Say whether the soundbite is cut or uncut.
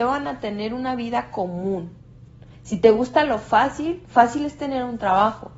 uncut